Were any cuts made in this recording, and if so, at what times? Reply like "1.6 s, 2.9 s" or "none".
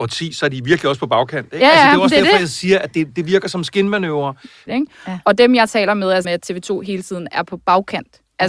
4.7 s, 6.2 s